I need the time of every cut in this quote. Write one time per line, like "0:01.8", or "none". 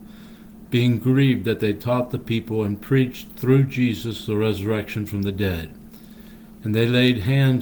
none